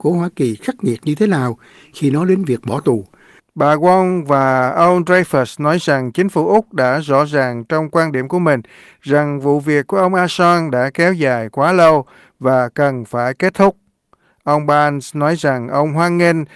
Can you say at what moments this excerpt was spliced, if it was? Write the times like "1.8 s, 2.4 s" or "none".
3.4 s